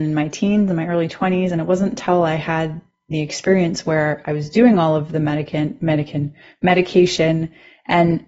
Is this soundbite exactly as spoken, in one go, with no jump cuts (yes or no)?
yes